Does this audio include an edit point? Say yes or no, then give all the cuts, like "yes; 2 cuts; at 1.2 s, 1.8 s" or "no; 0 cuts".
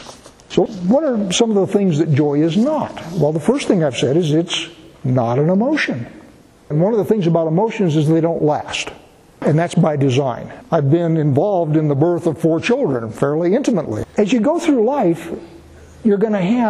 yes; 2 cuts; at 10.6 s, 14.0 s